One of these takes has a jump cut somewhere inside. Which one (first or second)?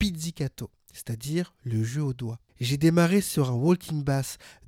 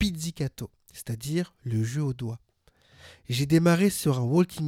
first